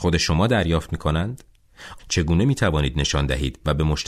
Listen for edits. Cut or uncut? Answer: cut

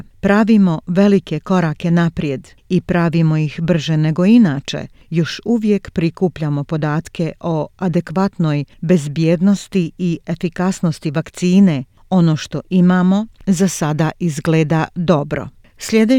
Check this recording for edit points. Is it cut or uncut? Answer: uncut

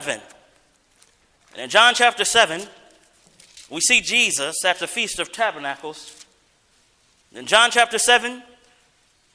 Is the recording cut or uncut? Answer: cut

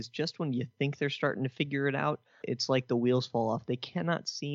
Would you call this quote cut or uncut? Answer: cut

